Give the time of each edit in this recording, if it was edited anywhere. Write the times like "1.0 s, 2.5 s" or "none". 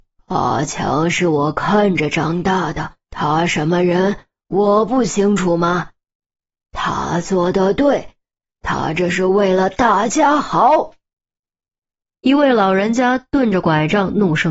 3.0 s

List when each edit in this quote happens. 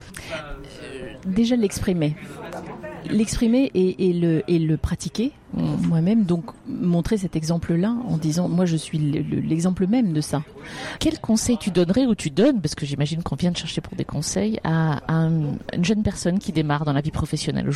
11.0 s

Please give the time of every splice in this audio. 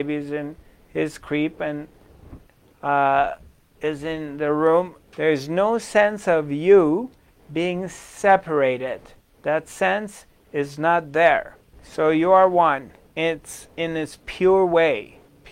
5.0 s, 13.0 s

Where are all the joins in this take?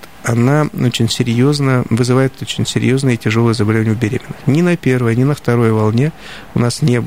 none

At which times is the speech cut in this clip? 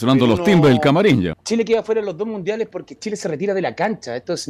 1.3 s

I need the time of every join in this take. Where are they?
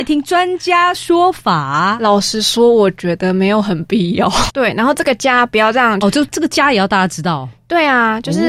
4.5 s, 6.0 s

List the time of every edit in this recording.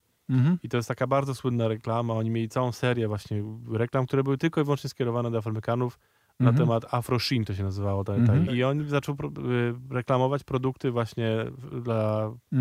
8.5 s

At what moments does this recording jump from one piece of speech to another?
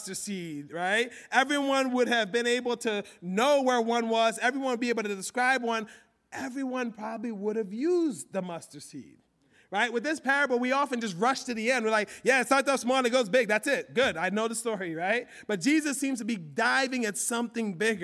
none

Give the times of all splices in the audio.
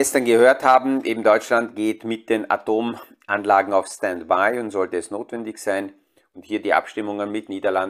none

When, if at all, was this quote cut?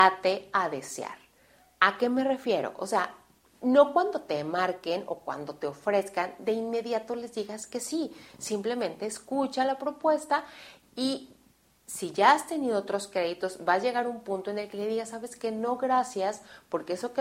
none

